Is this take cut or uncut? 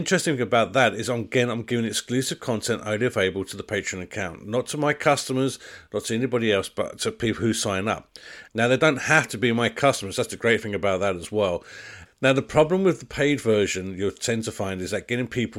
cut